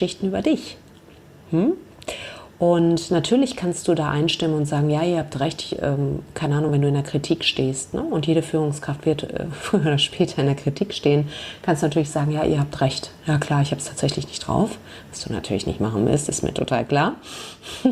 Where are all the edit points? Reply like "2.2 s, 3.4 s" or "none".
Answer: none